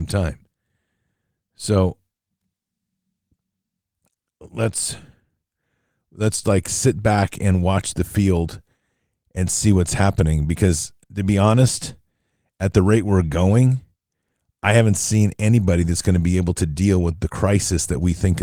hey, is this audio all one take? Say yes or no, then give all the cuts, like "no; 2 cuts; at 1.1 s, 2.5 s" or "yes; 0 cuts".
no; 1 cut; at 6.4 s